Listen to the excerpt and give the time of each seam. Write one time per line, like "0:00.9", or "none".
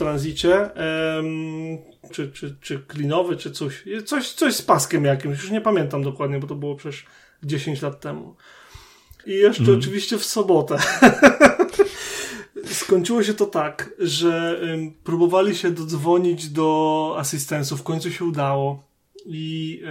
0:02.1
0:09.2